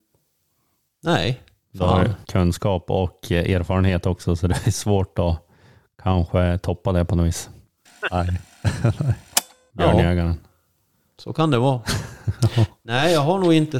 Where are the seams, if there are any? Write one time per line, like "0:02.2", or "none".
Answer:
0:02.2
0:07.9
0:09.7